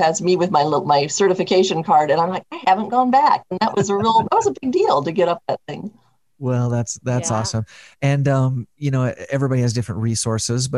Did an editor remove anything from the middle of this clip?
no; 0 cuts

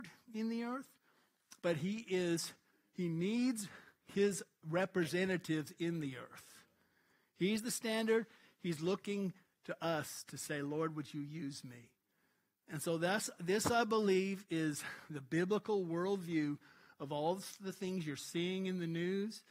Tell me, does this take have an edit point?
no; 0 cuts

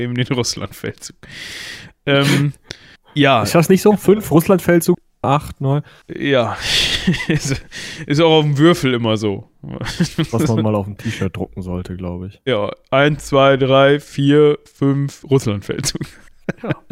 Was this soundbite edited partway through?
no; 0 cuts

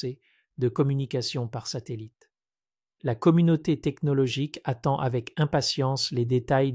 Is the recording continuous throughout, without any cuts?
no; 1 cut; at 2.9 s

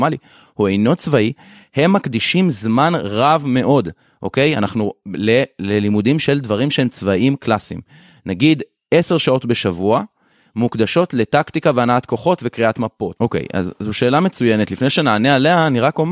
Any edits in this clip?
yes; 1 cut; at 13.2 s

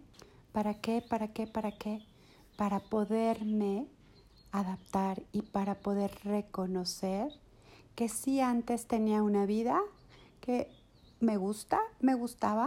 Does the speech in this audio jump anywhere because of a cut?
no; 0 cuts

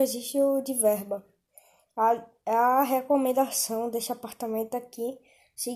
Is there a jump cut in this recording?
no; 0 cuts

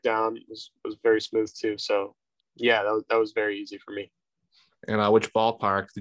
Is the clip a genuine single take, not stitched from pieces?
no; 1 cut; at 2.4 s

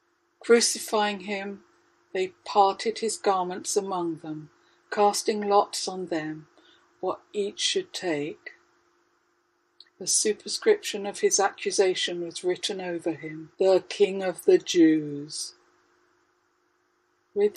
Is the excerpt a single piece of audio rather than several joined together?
no; 2 cuts; at 9.9 s, 13.5 s

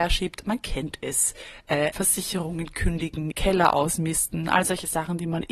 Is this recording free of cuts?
no; 2 cuts; at 1.9 s, 3.3 s

